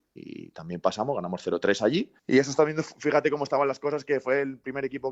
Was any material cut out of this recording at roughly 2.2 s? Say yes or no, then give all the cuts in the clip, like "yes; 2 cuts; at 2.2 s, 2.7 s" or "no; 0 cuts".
yes; 1 cut; at 2.2 s